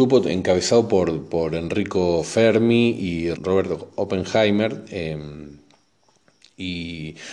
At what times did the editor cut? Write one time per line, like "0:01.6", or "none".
0:03.3

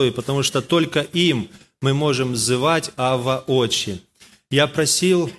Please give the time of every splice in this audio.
none

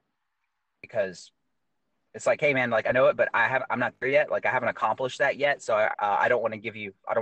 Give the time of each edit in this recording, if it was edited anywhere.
0:05.9

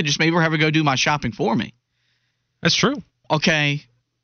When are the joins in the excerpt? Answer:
0:03.2

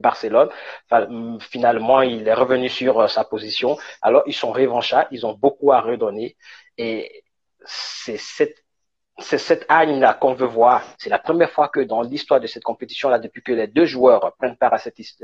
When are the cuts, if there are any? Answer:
0:04.0
0:10.9

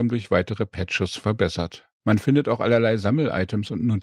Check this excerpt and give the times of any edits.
0:02.0

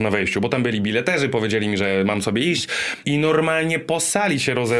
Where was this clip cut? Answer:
0:03.0

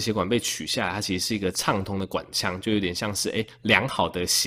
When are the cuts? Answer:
none

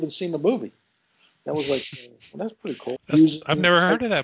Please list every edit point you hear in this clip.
0:03.0

